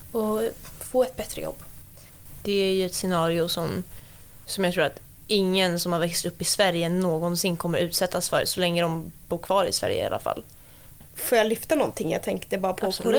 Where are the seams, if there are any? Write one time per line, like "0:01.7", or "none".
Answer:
none